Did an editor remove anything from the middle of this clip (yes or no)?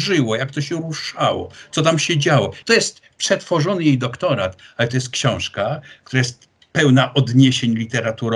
yes